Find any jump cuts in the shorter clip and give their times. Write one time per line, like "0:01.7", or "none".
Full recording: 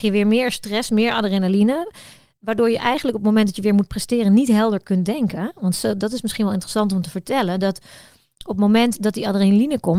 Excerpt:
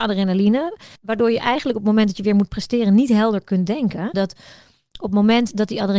0:01.0
0:04.1